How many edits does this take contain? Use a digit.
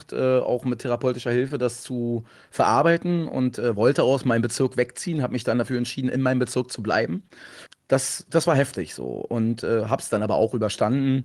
0